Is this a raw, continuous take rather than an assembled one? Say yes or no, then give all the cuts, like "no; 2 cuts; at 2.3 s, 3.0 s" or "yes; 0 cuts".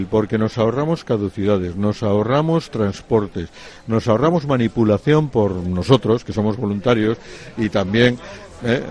yes; 0 cuts